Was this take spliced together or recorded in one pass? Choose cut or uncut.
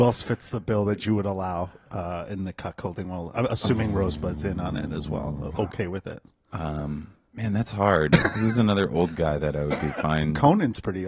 uncut